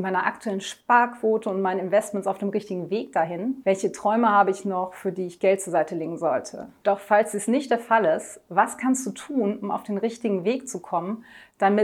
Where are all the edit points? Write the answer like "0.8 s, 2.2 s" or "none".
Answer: 3.6 s, 6.8 s